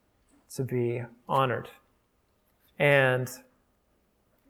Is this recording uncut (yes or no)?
no